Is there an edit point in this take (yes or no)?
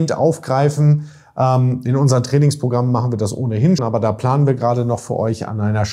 yes